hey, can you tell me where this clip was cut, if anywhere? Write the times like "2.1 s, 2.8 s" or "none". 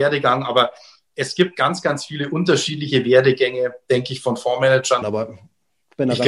5.0 s